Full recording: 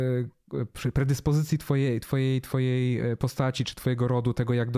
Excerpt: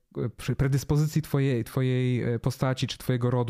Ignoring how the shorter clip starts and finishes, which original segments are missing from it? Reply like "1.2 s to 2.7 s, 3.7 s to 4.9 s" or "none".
2.0 s to 2.4 s